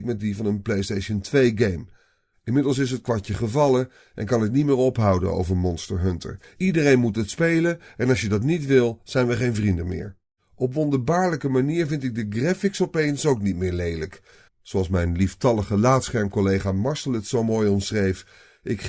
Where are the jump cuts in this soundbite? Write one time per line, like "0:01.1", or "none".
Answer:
0:14.5